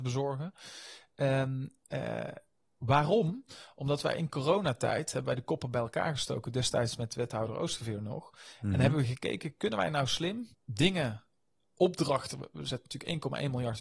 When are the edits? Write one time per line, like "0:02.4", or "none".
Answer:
0:10.5